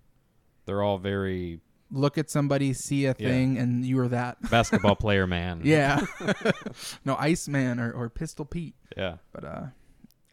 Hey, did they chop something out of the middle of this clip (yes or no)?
yes